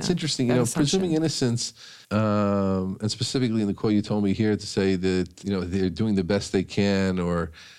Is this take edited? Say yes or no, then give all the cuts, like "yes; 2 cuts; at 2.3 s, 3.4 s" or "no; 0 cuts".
yes; 2 cuts; at 2.0 s, 5.4 s